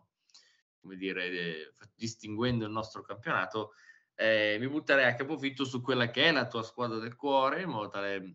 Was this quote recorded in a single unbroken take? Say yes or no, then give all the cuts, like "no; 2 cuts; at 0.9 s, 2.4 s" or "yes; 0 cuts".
yes; 0 cuts